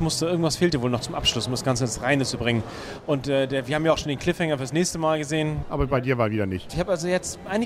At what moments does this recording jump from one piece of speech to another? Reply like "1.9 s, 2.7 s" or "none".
5.6 s, 6.7 s